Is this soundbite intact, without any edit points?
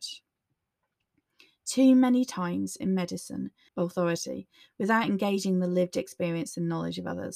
no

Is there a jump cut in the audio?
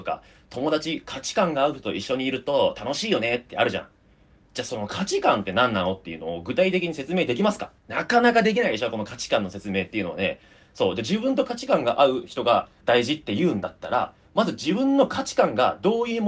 yes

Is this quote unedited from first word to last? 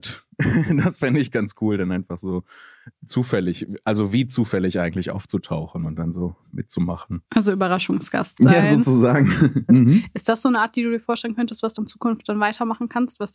no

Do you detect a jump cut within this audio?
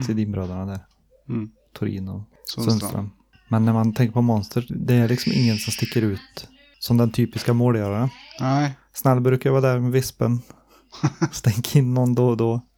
yes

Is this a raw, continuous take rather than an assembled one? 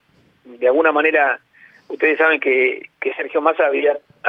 yes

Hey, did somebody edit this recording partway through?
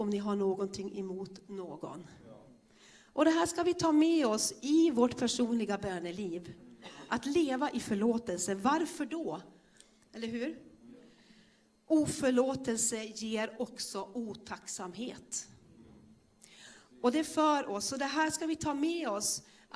yes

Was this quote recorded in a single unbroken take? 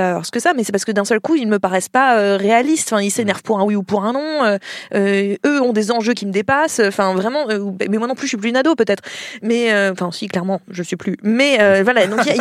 yes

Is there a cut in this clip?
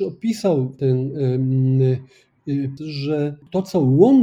yes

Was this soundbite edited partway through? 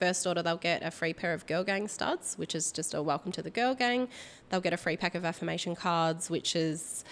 no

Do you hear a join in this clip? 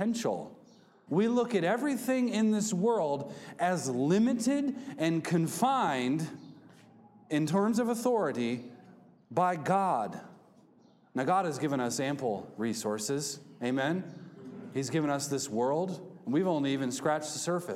yes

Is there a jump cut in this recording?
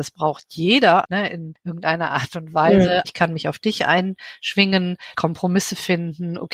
yes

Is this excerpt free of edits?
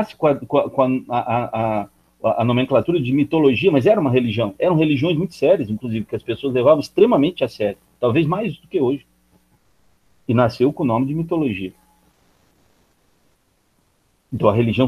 yes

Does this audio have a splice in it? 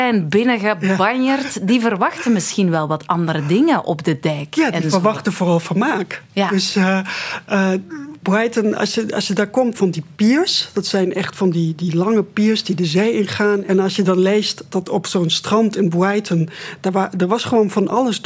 yes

